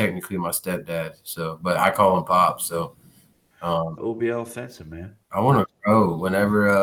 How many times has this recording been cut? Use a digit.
2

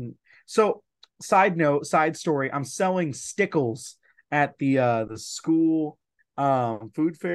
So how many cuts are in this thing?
0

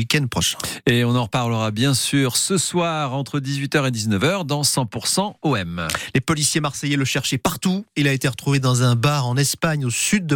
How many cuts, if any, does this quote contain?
0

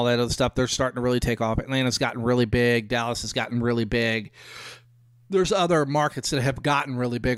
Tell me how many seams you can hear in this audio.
0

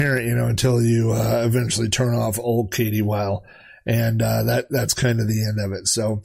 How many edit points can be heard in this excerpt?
0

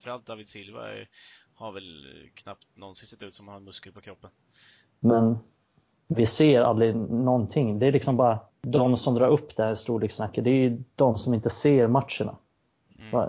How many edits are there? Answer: 2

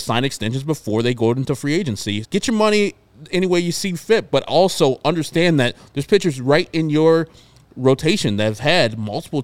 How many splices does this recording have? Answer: 1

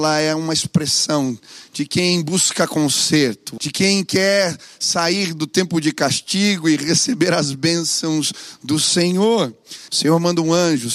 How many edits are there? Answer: 2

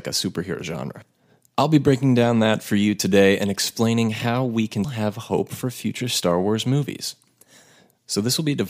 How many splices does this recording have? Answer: 1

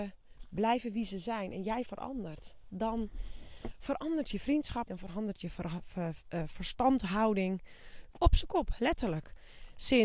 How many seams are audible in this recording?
2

